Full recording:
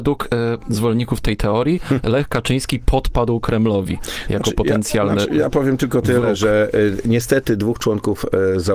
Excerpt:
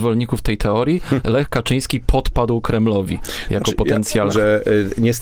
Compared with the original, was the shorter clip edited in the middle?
yes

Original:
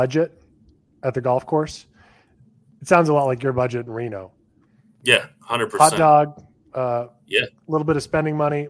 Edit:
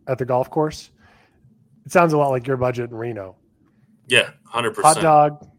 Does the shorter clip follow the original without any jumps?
yes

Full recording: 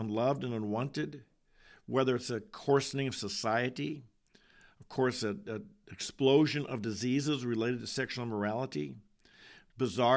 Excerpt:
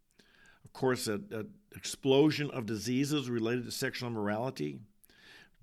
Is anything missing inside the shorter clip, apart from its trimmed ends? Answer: no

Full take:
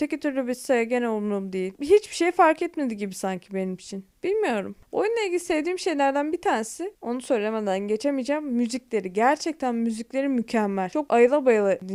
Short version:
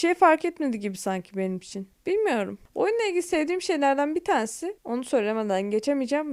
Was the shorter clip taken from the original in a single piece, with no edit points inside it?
yes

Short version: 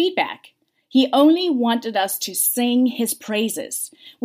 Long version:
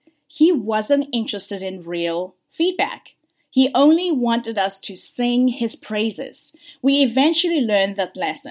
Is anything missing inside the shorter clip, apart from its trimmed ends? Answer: no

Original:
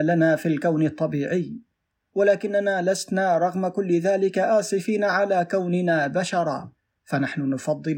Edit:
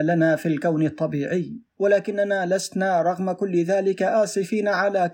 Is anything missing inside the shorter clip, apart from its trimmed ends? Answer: yes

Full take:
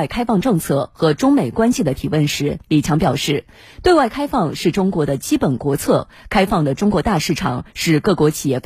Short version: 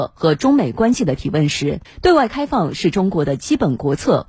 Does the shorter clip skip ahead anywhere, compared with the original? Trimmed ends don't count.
yes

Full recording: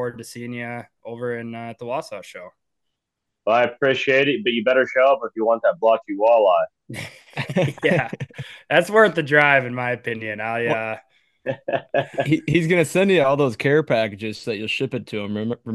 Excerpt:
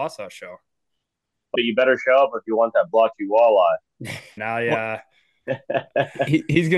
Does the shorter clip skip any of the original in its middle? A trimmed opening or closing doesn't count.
yes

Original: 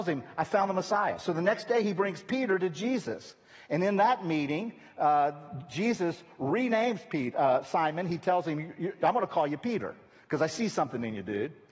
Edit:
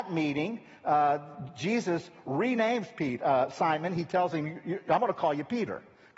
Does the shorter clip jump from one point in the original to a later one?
no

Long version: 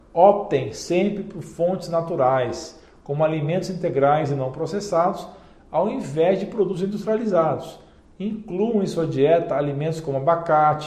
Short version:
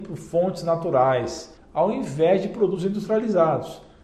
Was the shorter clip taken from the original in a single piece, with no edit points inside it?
no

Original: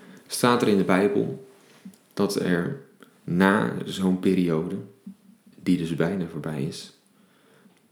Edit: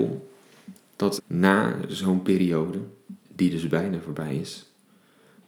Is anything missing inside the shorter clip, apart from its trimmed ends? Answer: yes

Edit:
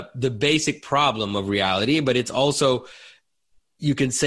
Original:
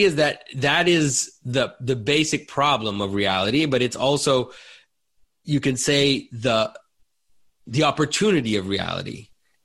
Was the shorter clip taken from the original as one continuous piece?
yes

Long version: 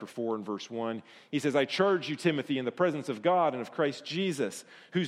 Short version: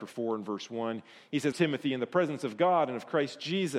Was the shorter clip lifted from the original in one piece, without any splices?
no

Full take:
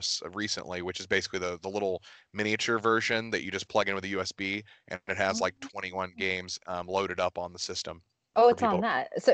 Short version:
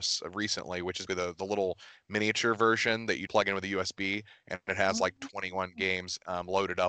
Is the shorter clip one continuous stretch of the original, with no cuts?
no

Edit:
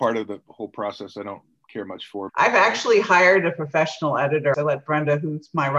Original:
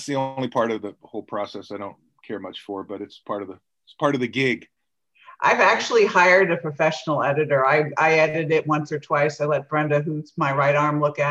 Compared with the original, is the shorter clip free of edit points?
no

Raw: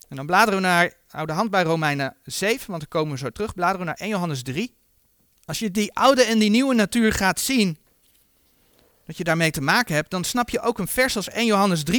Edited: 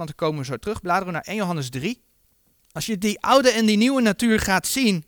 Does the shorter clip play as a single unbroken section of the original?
yes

